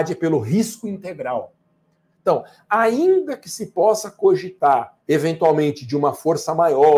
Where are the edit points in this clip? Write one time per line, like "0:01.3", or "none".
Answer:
0:02.1